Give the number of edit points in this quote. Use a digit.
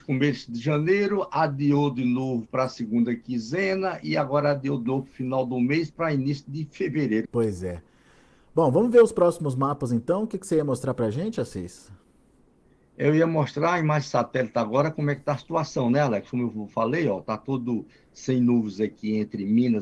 1